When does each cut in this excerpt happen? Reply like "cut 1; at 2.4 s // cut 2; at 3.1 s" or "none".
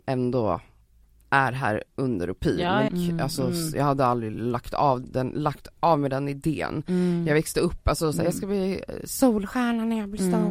cut 1; at 2.9 s // cut 2; at 8.1 s